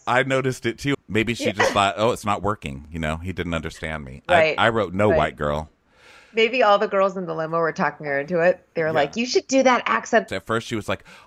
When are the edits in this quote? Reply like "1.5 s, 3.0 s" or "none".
0.9 s, 10.3 s